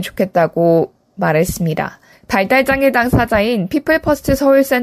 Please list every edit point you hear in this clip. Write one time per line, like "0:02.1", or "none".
0:02.1